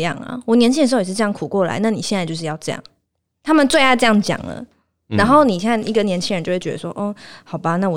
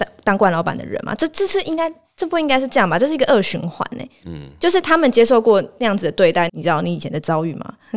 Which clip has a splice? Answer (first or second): second